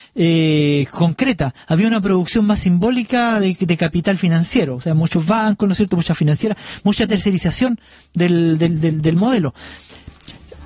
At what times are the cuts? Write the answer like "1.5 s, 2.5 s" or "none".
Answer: none

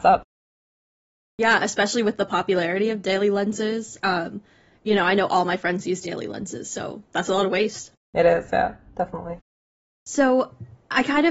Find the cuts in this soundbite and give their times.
7.1 s

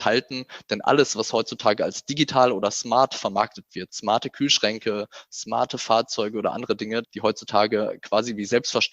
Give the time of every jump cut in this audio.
3.9 s, 7.0 s

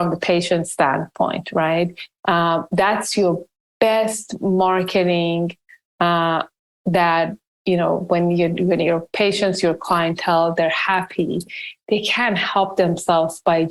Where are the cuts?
2.2 s

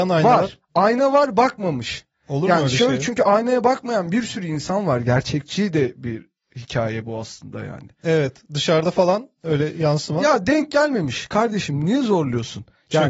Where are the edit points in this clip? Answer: none

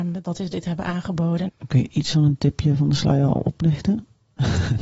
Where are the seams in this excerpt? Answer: 1.5 s

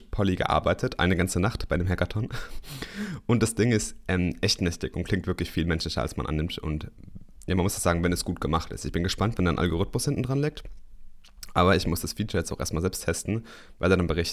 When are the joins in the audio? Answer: 9.4 s

